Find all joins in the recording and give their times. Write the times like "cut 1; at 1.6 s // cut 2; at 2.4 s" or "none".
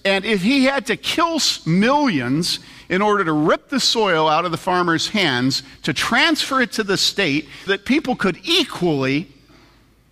cut 1; at 7.7 s